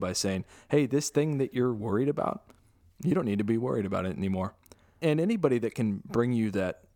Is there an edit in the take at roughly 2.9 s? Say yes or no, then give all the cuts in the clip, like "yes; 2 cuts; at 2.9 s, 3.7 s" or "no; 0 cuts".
no; 1 cut; at 5.0 s